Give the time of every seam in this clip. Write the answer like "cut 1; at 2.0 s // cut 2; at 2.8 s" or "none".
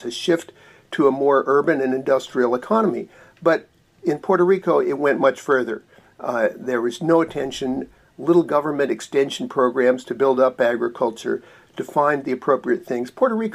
none

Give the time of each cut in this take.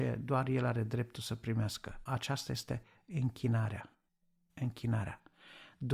none

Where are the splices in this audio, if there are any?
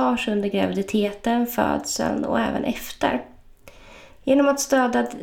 cut 1; at 4.1 s

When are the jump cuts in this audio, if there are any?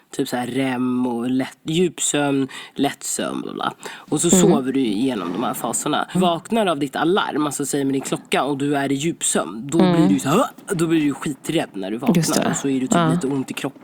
cut 1; at 3.4 s // cut 2; at 6.1 s

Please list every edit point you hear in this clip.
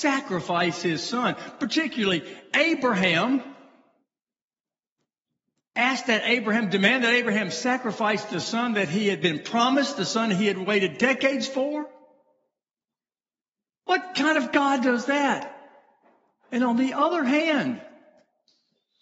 none

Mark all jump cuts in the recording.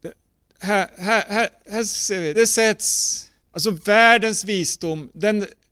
cut 1; at 2.3 s

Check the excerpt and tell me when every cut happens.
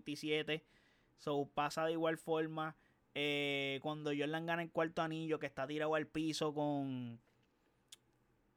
none

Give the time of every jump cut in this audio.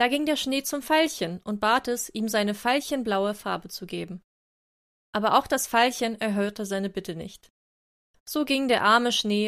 none

